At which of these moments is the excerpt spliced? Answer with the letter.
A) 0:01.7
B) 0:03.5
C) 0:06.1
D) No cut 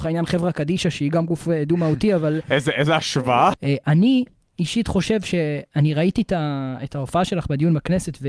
B